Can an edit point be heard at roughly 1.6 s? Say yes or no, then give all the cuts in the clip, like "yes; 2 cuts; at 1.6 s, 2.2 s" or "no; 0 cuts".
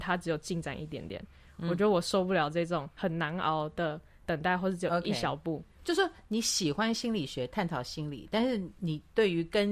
no; 0 cuts